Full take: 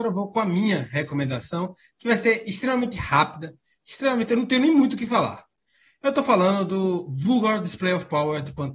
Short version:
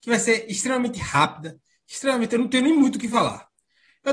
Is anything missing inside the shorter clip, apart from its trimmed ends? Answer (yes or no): no